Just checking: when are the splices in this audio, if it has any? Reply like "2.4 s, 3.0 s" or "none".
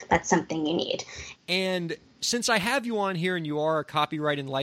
1.3 s